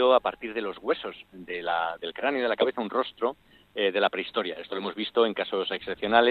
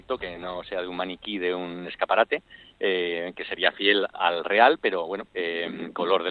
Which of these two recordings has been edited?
second; 2 cuts; at 4.1 s, 5.3 s

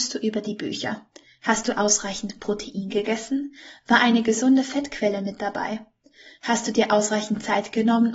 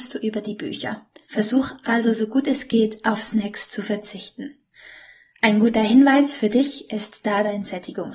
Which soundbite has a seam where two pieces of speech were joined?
second; 1 cut; at 1.2 s

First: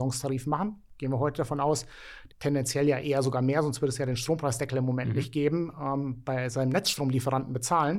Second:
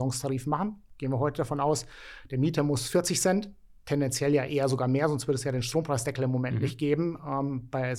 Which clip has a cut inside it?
first; 1 cut; at 2.3 s

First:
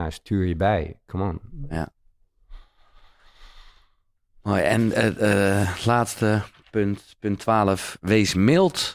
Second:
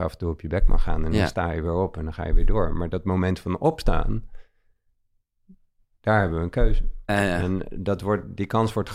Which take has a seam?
second; 1 cut; at 7.1 s

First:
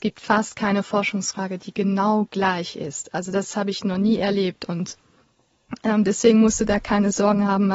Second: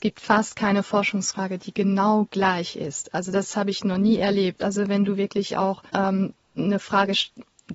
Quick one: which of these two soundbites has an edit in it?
second; 2 cuts; at 4.6 s, 5.9 s

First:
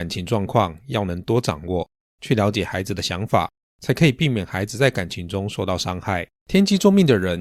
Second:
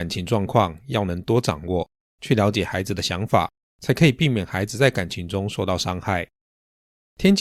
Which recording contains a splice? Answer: first; 1 cut; at 6.4 s

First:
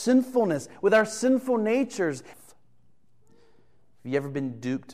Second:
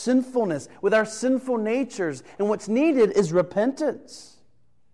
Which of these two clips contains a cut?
first; 1 cut; at 2.3 s

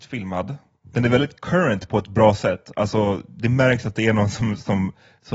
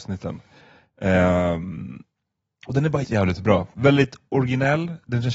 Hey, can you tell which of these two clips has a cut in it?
second; 1 cut; at 3.0 s

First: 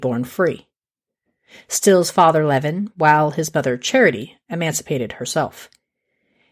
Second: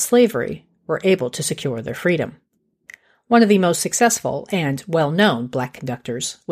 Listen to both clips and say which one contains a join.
first; 1 cut; at 2.9 s

